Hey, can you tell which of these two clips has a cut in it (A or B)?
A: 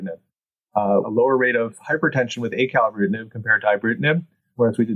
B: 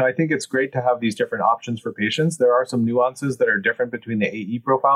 A